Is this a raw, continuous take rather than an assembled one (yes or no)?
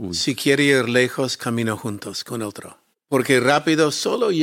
no